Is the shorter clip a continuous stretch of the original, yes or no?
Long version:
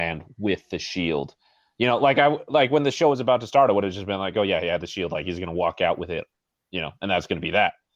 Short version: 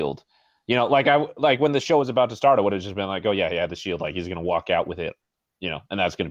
yes